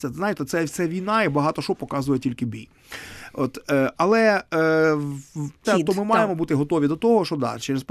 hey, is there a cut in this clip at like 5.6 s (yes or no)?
yes